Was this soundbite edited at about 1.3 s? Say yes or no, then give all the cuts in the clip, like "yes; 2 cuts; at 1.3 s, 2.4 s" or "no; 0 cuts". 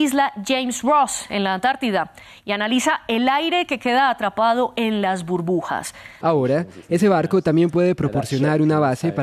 no; 1 cut; at 6.2 s